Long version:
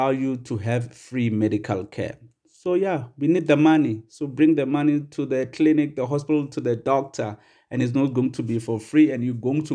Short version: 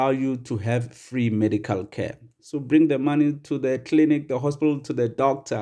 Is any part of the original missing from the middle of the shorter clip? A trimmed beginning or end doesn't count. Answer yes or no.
yes